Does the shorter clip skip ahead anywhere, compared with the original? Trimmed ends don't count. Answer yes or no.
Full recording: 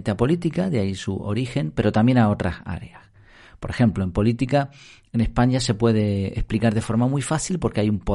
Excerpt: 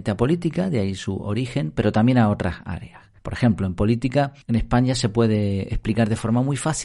yes